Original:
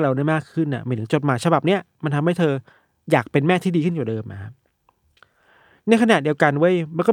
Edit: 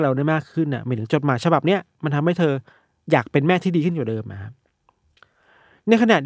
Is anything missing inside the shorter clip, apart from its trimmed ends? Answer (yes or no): no